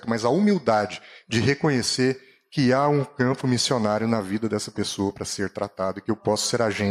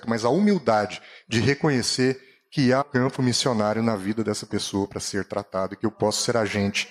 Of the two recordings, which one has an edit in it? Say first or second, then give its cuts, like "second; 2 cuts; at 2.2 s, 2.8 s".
second; 1 cut; at 2.8 s